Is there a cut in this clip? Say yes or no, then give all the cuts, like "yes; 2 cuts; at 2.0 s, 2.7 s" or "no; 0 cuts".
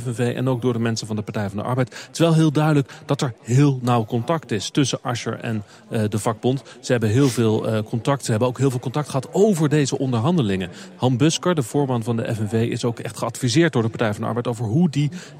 no; 0 cuts